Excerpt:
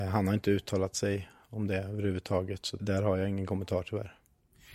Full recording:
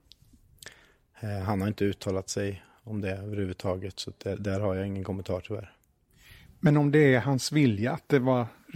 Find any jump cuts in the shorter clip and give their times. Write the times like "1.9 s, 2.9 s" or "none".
2.8 s